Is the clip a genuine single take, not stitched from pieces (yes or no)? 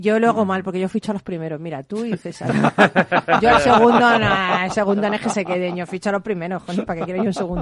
yes